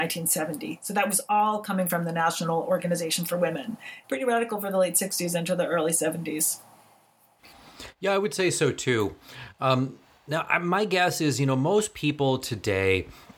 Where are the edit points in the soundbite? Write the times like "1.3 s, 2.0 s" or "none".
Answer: 4.0 s